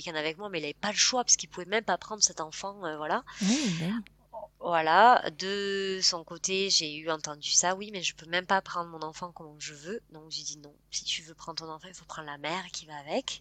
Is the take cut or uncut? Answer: uncut